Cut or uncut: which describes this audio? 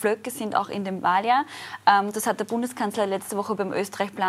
uncut